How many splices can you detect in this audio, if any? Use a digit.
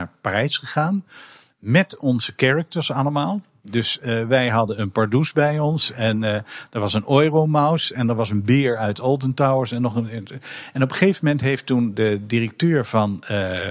0